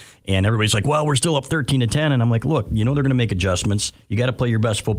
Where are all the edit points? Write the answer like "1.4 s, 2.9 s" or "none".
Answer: none